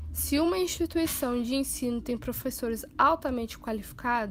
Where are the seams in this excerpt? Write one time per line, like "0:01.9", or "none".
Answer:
none

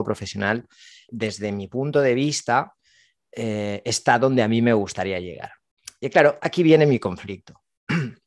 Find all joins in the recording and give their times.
0:01.1

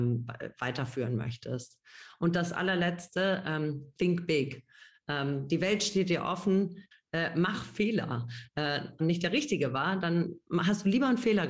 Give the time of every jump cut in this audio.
0:06.9
0:09.0

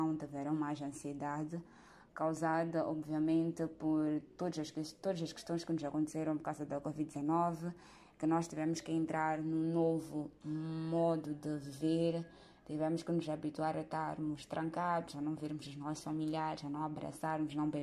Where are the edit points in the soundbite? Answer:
none

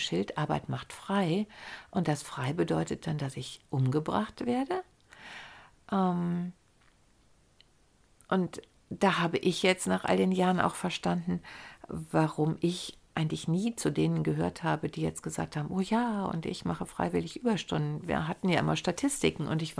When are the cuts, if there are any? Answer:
none

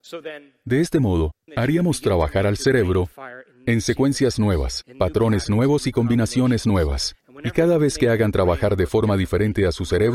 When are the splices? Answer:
0:01.5

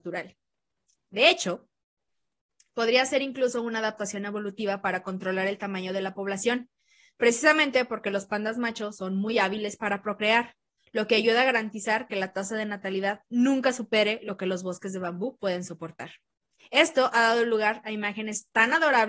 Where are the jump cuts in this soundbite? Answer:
0:16.6

